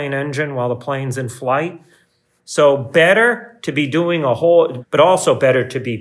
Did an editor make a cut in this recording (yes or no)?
yes